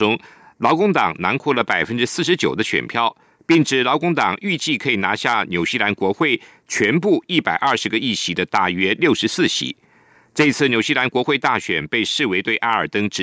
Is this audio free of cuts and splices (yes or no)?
no